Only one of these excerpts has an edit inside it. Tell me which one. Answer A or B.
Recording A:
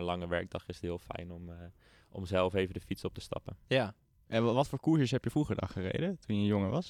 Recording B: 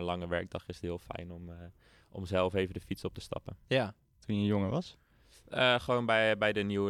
B